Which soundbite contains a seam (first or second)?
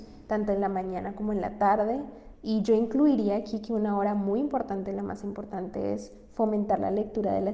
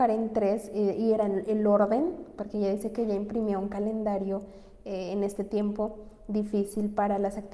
first